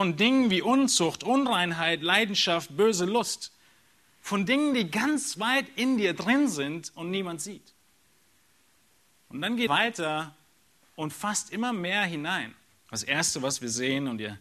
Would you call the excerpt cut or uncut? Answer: cut